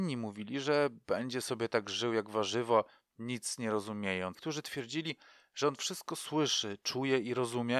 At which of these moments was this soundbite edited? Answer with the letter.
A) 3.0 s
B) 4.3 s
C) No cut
B